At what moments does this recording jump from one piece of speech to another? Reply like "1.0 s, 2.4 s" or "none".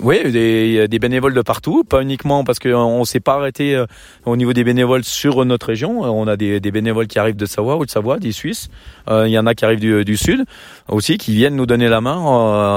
7.4 s